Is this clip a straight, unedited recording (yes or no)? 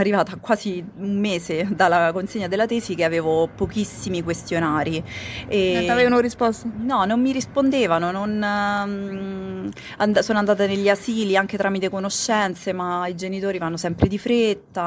yes